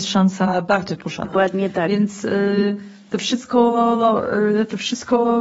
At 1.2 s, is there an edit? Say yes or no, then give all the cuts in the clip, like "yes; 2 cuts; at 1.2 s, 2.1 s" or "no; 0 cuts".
yes; 1 cut; at 1.2 s